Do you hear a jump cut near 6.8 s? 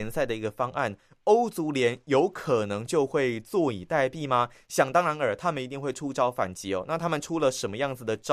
no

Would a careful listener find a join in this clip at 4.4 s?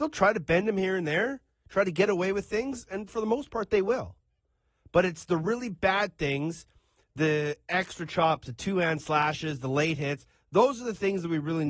no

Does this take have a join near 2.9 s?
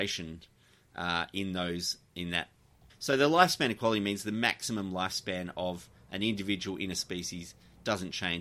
yes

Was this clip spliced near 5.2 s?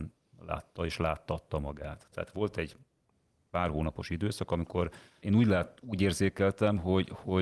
yes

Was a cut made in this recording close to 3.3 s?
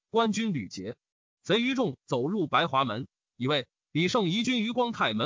yes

